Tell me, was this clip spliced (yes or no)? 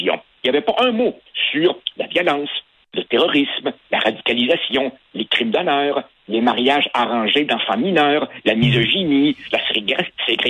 no